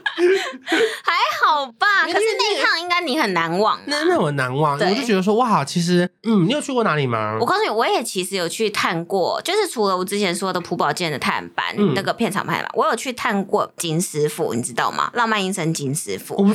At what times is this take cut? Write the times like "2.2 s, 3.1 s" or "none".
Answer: 6.2 s